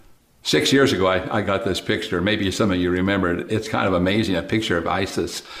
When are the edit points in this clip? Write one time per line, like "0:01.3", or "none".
0:03.5